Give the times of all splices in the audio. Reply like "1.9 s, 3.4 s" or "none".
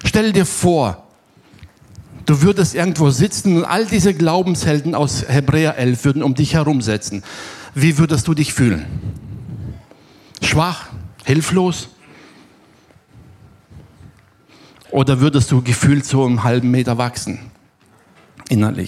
none